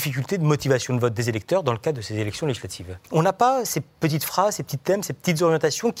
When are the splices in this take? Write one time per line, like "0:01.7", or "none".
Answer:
0:03.0